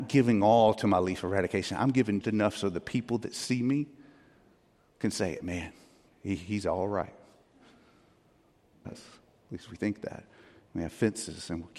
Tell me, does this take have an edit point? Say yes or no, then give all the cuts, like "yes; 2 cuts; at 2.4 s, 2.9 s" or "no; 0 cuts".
yes; 2 cuts; at 2.2 s, 8.8 s